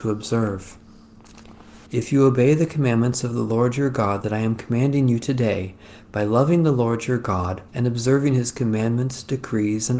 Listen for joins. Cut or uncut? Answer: cut